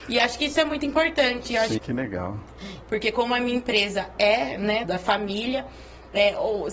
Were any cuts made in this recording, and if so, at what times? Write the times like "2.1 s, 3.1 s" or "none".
1.8 s, 2.8 s, 4.8 s